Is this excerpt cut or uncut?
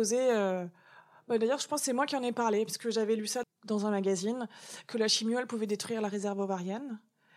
cut